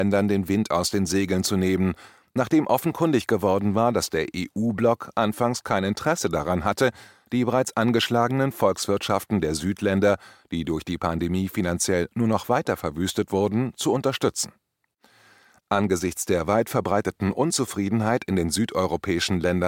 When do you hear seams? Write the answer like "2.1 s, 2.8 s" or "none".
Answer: none